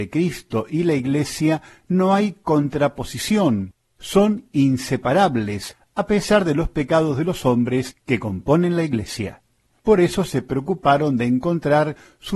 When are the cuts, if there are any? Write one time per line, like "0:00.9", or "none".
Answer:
0:09.7